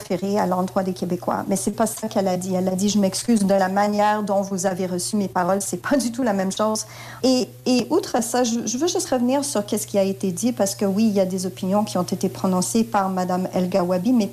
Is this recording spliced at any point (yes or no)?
yes